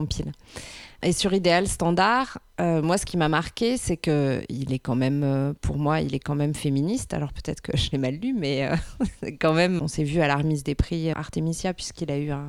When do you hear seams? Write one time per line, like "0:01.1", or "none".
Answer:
0:09.8
0:11.1